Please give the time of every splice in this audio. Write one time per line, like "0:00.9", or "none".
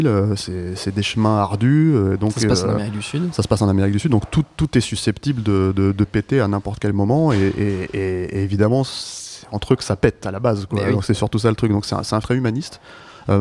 0:12.2